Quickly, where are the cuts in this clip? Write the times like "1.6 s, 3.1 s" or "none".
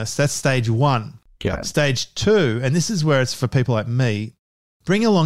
none